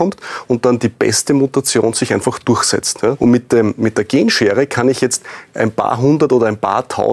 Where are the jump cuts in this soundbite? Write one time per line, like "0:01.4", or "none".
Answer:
0:03.2